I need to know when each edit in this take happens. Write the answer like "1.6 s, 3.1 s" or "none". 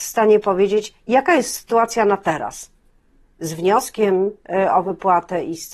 none